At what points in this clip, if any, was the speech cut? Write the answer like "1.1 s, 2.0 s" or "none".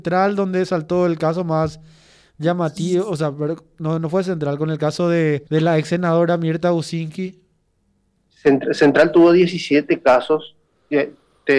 5.5 s